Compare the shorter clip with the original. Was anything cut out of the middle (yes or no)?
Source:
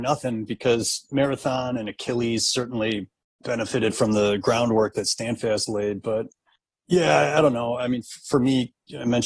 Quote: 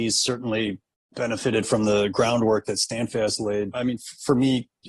yes